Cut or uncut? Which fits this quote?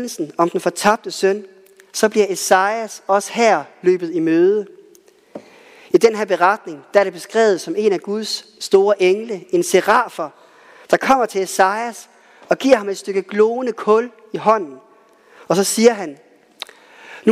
uncut